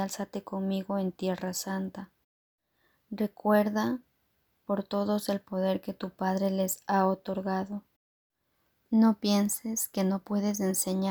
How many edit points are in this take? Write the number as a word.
zero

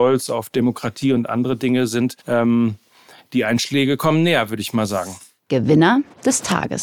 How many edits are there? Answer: one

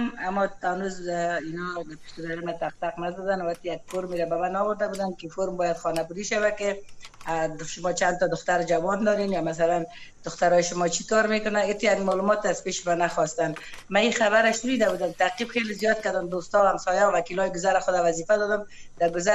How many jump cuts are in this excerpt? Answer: zero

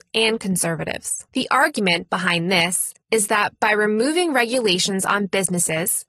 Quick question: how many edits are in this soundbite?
one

